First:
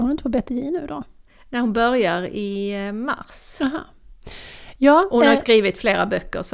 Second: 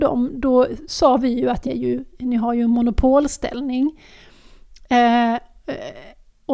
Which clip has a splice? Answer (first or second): second